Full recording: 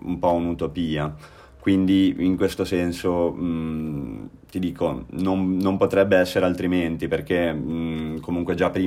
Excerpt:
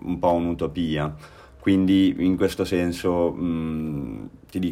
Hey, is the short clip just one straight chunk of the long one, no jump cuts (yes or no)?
yes